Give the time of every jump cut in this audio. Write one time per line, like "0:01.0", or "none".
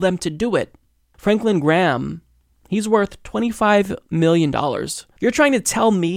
0:01.1
0:05.2